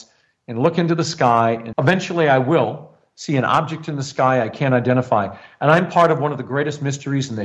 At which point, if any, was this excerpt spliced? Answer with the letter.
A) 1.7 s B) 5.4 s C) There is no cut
A